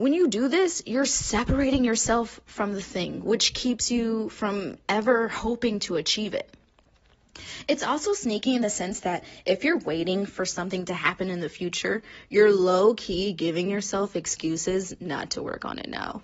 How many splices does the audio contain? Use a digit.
0